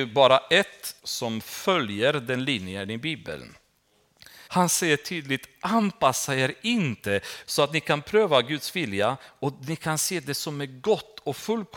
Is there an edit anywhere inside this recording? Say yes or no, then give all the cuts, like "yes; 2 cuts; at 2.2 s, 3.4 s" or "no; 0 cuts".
yes; 3 cuts; at 1.0 s, 4.5 s, 7.4 s